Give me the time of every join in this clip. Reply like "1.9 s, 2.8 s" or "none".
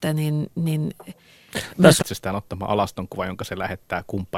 2.0 s